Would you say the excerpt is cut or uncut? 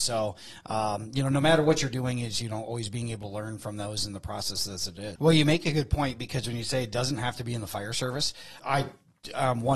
cut